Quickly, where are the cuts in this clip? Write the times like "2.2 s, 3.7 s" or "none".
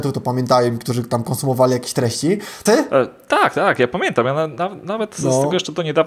2.7 s